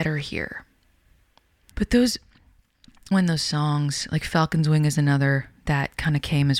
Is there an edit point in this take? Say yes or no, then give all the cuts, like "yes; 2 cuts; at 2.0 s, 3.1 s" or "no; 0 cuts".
yes; 2 cuts; at 1.7 s, 3.1 s